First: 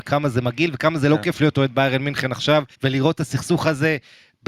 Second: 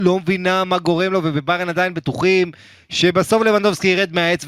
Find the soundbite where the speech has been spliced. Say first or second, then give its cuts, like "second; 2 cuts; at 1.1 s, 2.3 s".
first; 1 cut; at 2.7 s